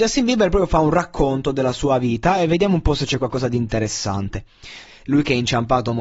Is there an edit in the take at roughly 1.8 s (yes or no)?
no